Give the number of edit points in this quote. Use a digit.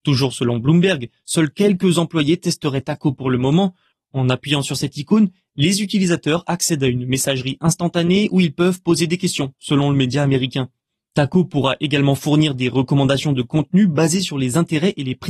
1